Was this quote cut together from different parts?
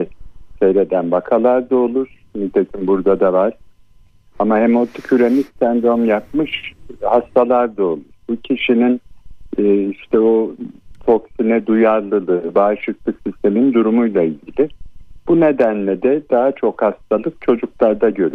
no; 0 cuts

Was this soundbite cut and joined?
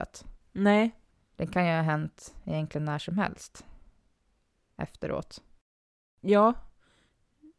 no; 0 cuts

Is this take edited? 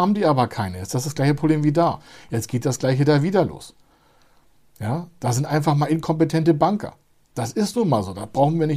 no; 0 cuts

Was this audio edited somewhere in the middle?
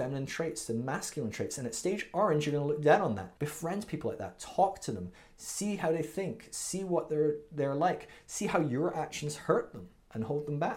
yes; 1 cut; at 3.4 s

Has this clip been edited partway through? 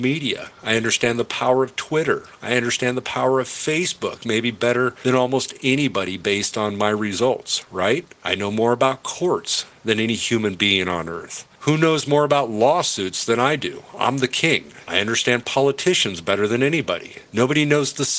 no; 0 cuts

